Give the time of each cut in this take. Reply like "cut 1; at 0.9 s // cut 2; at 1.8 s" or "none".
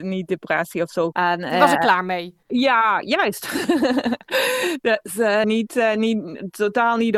cut 1; at 1.1 s // cut 2; at 5.4 s